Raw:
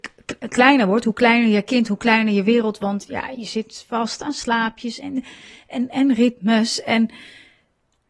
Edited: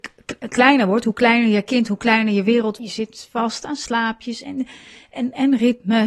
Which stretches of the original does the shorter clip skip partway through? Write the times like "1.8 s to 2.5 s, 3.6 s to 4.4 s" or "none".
2.8 s to 3.4 s